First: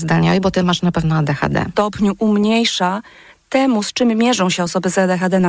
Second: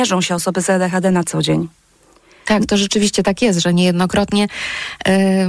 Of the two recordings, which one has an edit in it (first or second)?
first